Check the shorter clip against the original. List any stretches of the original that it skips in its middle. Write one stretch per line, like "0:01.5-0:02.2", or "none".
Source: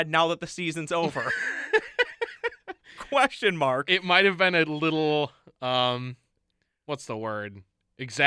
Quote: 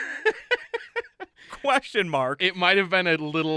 none